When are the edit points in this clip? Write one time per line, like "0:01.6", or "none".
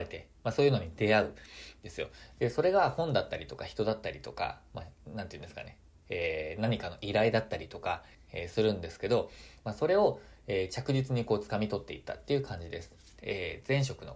0:08.1
0:13.2